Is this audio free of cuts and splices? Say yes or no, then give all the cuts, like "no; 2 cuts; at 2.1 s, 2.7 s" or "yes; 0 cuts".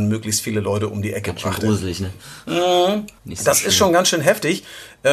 no; 1 cut; at 3.2 s